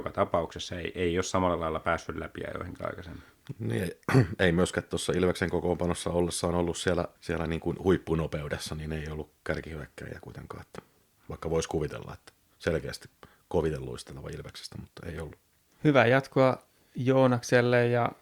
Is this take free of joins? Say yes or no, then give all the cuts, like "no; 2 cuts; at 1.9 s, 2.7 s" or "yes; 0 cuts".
no; 2 cuts; at 7.1 s, 15.7 s